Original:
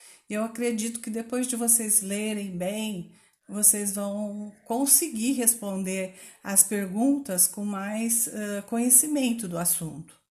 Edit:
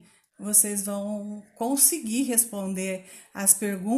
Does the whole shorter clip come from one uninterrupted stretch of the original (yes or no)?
yes